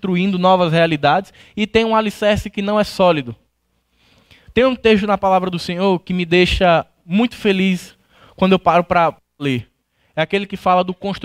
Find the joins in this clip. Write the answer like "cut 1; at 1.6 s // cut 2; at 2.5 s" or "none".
none